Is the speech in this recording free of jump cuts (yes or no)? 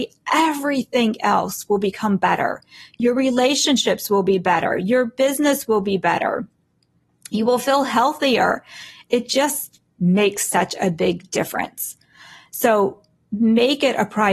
no